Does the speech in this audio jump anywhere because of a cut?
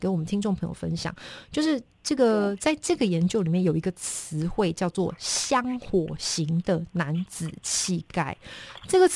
no; 0 cuts

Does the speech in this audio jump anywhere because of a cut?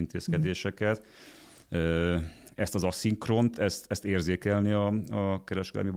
no; 0 cuts

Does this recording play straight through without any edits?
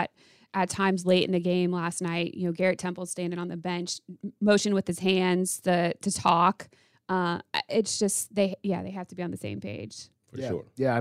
yes; 0 cuts

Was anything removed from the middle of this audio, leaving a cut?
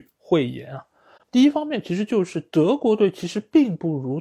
yes; 1 cut; at 1.2 s

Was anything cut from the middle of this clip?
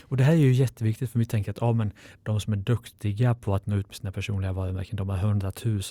no; 0 cuts

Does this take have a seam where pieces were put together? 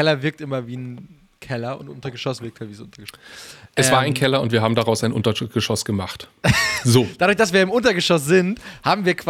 no; 0 cuts

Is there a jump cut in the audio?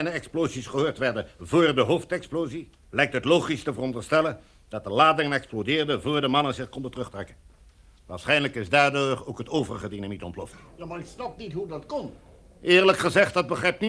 yes; 1 cut; at 2.8 s

